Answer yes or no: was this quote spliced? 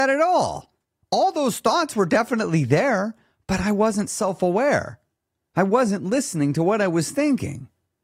no